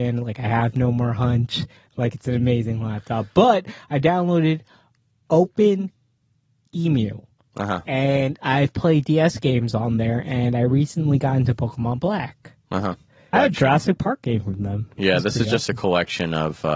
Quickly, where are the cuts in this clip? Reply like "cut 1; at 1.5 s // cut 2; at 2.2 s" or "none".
cut 1; at 7.8 s // cut 2; at 13.3 s